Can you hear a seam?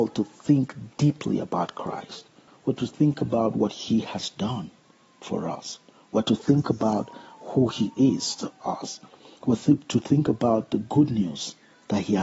yes; 1 cut; at 2.5 s

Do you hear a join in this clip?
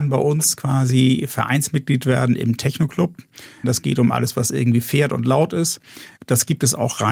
yes; 2 cuts; at 3.6 s, 6.2 s

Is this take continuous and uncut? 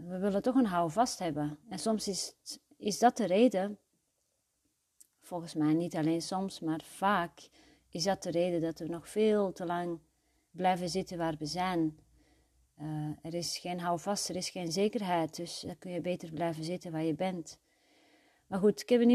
yes; 0 cuts

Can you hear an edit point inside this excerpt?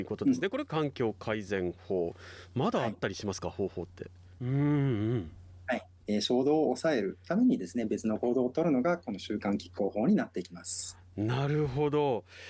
yes; 2 cuts; at 4.4 s, 6.0 s

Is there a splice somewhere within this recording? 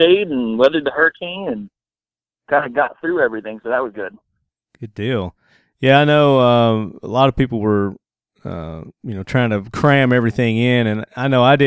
no; 0 cuts

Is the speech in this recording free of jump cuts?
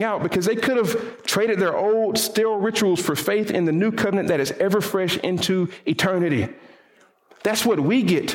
yes; 0 cuts

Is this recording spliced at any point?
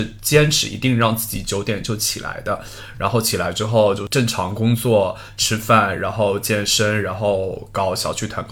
no; 0 cuts

